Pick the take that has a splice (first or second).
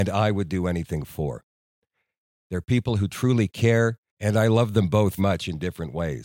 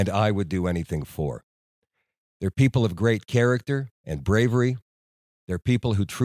first